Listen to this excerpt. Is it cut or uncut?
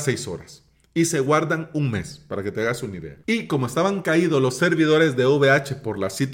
uncut